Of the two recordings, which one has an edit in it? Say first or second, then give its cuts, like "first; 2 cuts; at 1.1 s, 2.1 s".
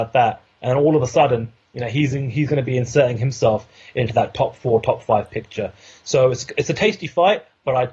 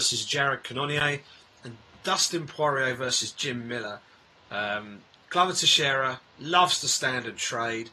second; 2 cuts; at 4.4 s, 6.3 s